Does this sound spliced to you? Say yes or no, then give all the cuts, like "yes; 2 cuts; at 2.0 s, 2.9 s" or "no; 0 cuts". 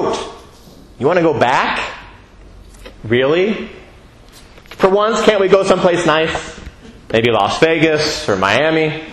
yes; 1 cut; at 7.0 s